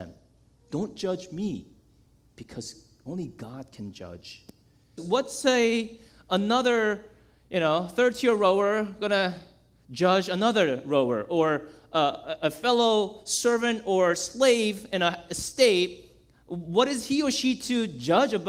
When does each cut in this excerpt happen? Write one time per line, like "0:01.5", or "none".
0:05.0